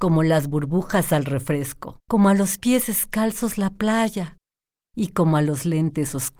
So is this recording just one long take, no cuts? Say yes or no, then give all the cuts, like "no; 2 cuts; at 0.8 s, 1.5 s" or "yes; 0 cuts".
no; 1 cut; at 2.0 s